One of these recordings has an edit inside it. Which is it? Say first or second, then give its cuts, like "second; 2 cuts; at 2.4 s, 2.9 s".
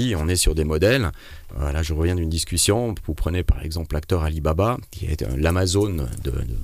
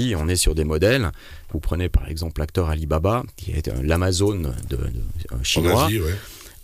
second; 1 cut; at 1.5 s